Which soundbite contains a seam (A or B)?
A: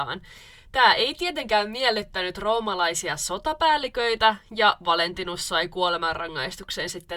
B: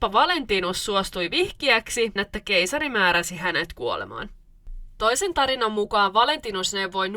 B